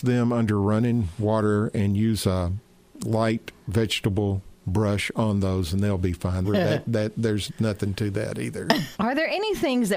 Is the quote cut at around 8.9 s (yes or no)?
yes